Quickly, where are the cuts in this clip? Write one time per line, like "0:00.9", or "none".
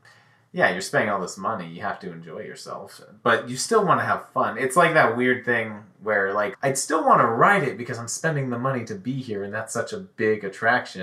0:06.5